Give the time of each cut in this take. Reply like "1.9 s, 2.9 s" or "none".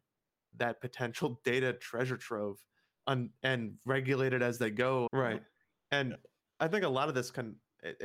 3.0 s, 5.1 s